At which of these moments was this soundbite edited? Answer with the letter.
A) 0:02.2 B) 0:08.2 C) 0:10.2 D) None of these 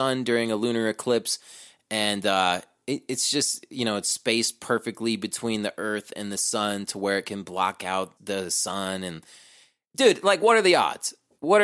B